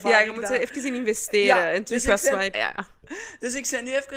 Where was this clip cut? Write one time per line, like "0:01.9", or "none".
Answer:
0:02.5

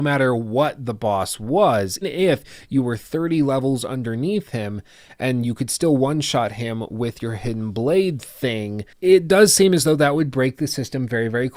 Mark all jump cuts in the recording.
0:02.0

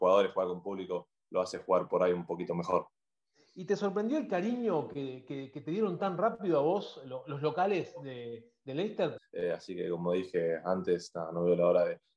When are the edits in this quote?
0:09.2

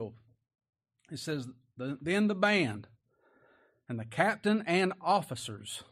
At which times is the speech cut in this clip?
none

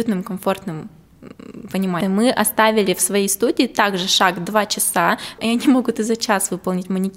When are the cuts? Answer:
0:02.0
0:05.4

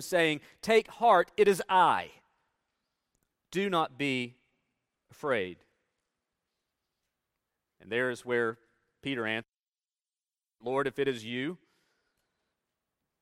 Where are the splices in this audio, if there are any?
none

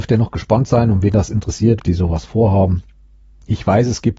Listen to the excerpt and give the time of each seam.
0:01.8

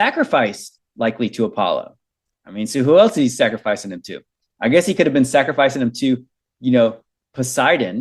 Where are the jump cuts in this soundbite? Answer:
0:02.3

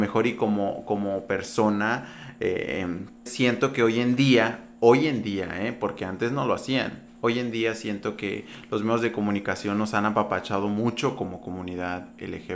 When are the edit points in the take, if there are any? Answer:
0:03.3

